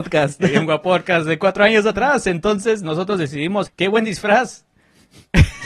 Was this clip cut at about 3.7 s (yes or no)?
yes